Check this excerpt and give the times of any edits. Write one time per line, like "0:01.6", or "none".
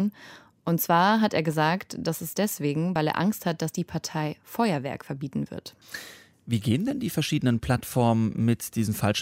none